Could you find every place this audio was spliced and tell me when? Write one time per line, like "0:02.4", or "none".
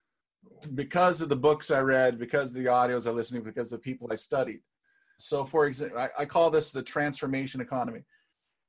0:05.2